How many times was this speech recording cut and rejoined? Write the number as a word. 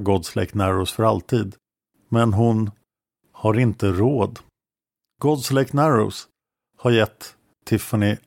one